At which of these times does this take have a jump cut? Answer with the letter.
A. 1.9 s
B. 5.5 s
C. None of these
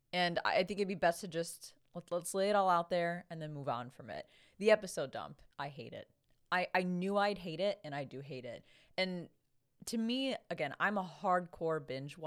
B